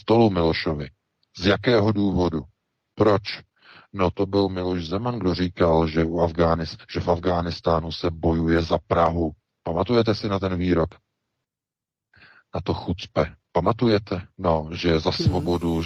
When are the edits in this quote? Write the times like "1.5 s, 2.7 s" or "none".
14.3 s